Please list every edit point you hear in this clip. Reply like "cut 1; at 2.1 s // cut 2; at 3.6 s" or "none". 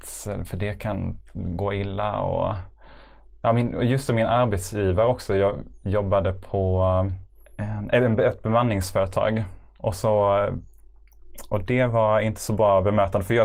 none